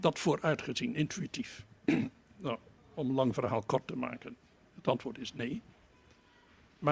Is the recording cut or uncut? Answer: uncut